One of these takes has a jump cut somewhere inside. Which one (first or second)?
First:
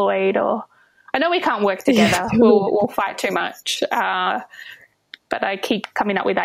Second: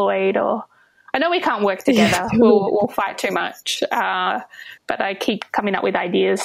second